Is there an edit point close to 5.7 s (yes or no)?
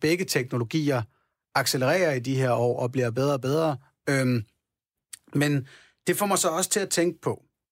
no